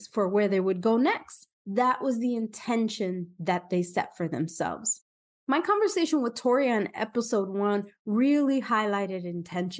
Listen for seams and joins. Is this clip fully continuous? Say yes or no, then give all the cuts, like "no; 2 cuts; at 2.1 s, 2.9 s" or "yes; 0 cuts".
yes; 0 cuts